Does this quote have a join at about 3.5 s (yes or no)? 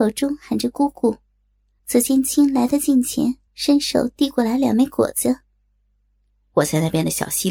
yes